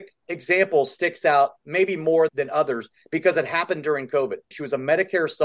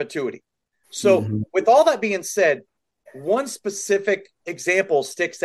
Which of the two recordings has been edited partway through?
first; 1 cut; at 4.5 s

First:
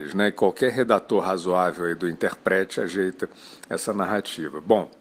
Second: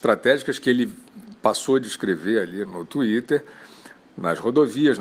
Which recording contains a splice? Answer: second; 1 cut; at 2.7 s

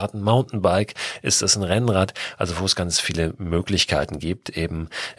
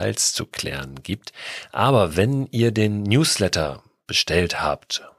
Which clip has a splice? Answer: first; 1 cut; at 2.7 s

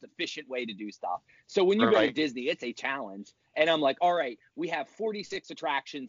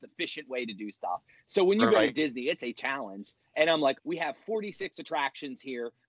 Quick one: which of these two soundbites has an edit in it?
second; 1 cut; at 4.0 s

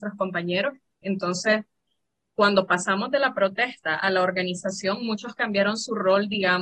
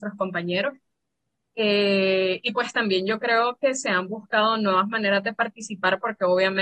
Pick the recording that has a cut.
first; 1 cut; at 1.0 s

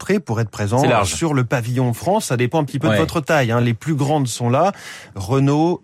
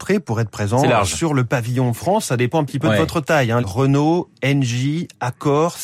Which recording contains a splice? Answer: second; 1 cut; at 3.6 s

